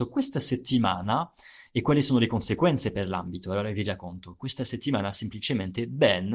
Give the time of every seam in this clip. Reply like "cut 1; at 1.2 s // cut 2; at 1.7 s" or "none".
none